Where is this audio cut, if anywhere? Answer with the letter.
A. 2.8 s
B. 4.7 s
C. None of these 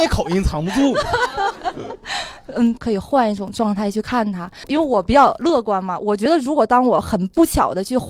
A